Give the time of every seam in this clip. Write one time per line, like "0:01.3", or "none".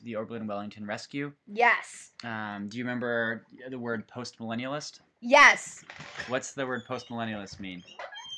none